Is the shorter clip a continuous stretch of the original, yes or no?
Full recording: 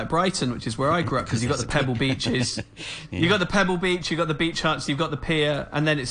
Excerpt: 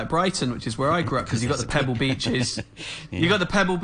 yes